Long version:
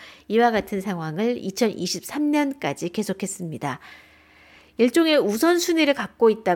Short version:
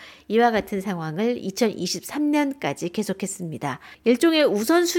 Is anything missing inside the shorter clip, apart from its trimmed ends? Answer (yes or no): yes